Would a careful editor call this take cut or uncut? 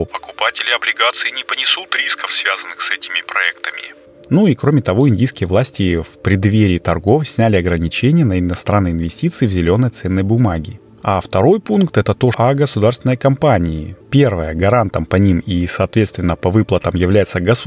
cut